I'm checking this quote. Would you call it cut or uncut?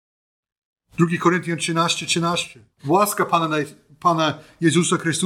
cut